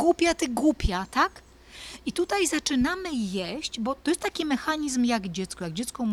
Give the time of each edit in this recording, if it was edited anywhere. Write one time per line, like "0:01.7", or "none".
none